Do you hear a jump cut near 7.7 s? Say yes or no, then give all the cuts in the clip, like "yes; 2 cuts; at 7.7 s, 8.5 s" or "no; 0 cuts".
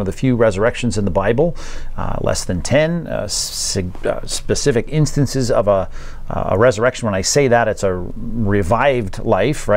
no; 0 cuts